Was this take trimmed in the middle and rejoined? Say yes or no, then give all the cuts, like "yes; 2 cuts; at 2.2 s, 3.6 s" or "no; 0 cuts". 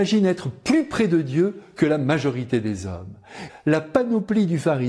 yes; 1 cut; at 3.5 s